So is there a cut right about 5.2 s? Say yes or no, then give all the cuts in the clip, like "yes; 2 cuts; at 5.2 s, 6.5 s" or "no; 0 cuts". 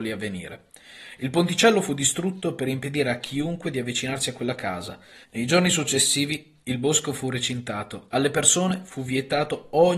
yes; 1 cut; at 5.2 s